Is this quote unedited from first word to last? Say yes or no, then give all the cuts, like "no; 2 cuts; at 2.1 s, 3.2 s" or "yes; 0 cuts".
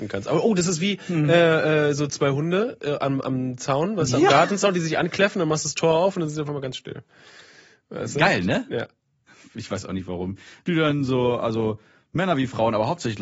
no; 2 cuts; at 9.3 s, 10.6 s